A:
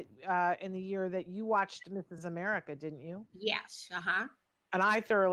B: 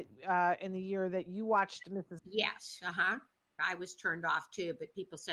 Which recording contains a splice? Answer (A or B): B